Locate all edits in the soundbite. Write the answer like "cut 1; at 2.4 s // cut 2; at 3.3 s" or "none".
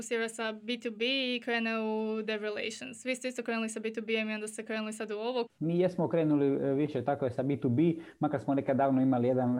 cut 1; at 5.5 s